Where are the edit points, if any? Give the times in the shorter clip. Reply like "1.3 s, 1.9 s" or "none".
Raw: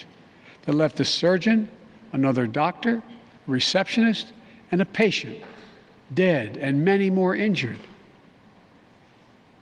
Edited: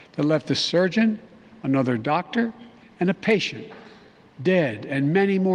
2.8 s

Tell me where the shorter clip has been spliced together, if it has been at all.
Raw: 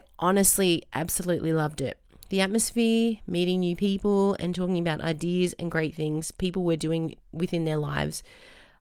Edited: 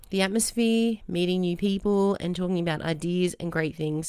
none

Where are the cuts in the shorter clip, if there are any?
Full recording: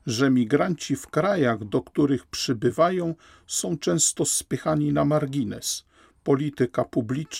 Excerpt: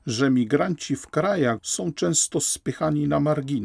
1.6 s

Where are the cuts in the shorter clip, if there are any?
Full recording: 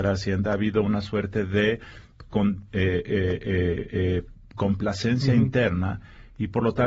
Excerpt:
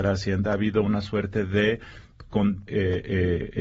2.7 s

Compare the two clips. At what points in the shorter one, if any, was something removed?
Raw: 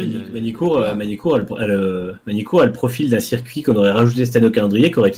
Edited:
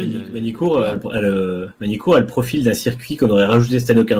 0.9 s

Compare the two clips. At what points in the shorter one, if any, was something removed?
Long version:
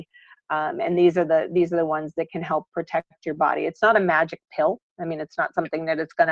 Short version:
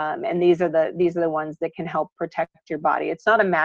none

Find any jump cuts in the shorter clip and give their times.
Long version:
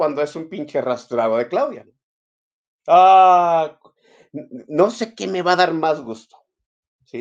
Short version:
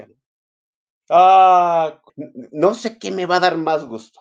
2.1 s

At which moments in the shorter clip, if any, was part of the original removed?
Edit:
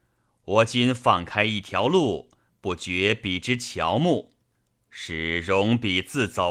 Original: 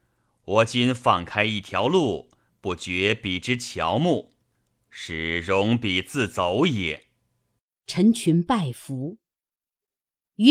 none

